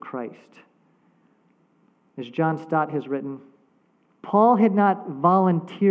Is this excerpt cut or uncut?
cut